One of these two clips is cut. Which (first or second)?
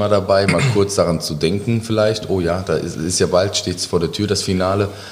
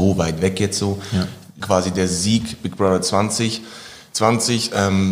second